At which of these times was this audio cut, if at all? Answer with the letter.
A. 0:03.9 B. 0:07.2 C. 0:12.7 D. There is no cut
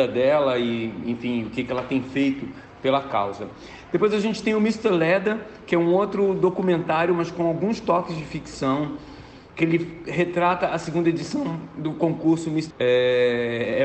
C